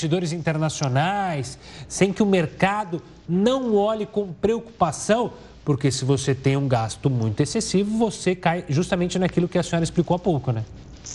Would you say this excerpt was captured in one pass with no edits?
yes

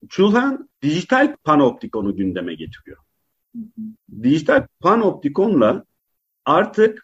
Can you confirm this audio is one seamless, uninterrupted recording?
yes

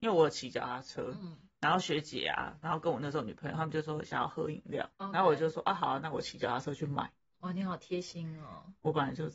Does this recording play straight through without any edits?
no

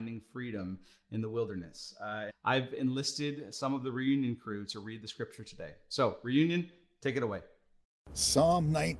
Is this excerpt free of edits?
no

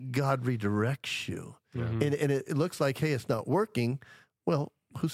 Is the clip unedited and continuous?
yes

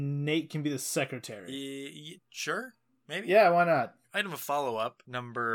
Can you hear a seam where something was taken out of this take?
yes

